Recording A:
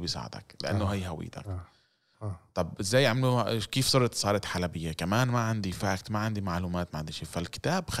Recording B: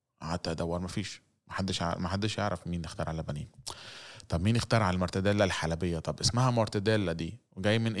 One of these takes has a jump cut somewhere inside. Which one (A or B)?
A